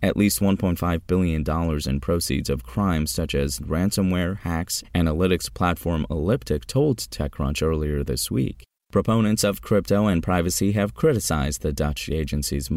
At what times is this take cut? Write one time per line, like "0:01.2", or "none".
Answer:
0:04.8